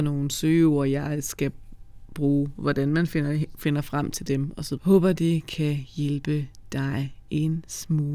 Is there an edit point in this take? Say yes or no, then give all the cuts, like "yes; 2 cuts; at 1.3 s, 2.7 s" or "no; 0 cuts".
yes; 1 cut; at 4.8 s